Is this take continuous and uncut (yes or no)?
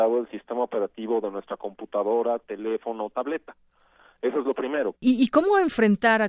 no